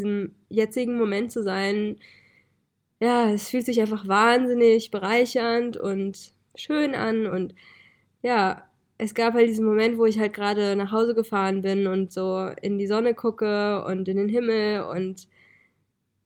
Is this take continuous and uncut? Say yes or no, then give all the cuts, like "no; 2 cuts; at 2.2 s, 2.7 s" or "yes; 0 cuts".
no; 1 cut; at 7.3 s